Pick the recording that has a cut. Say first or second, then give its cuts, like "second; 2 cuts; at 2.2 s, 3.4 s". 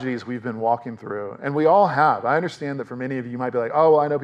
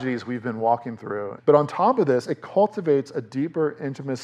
second; 1 cut; at 1.4 s